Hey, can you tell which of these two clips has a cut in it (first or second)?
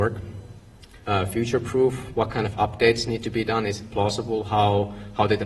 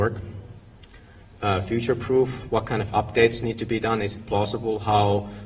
first